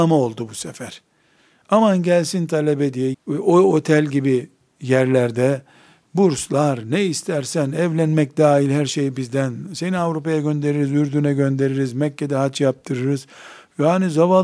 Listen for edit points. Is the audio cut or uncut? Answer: cut